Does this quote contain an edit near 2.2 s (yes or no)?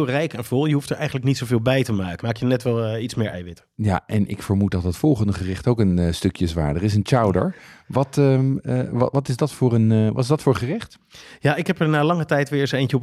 yes